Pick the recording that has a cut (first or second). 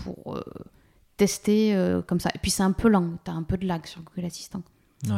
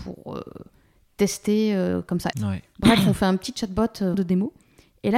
second